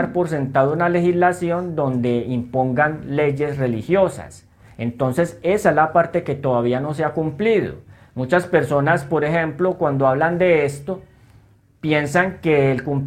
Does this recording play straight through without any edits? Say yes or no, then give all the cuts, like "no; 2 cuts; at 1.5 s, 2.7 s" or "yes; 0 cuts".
yes; 0 cuts